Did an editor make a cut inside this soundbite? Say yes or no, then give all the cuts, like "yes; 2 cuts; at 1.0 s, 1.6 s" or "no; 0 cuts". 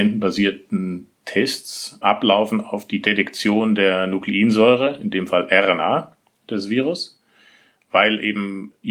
no; 0 cuts